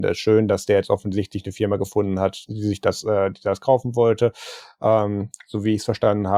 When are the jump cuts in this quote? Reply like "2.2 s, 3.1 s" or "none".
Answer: 2.5 s